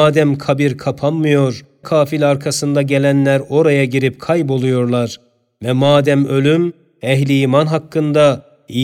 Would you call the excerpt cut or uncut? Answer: cut